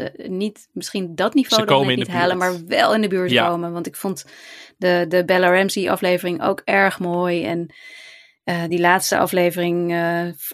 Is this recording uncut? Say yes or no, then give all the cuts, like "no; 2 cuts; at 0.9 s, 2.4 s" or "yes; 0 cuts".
yes; 0 cuts